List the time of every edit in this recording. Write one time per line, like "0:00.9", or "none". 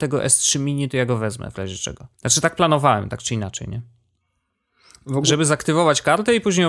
0:02.1